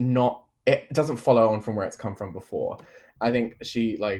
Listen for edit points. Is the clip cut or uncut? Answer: cut